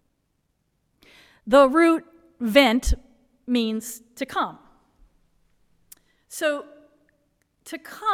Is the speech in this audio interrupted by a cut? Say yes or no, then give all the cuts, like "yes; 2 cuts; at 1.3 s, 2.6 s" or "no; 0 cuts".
no; 0 cuts